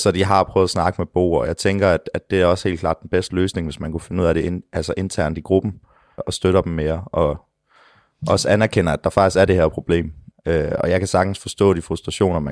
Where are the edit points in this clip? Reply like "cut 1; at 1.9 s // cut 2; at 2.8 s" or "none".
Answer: cut 1; at 6.2 s // cut 2; at 10.3 s